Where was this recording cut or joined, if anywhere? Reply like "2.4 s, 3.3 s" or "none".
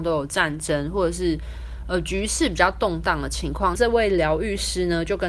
3.7 s